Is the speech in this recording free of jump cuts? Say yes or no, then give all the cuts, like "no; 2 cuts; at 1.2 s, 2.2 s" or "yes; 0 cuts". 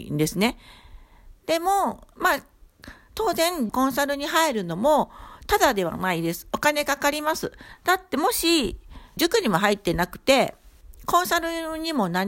no; 3 cuts; at 3.7 s, 7.7 s, 9.2 s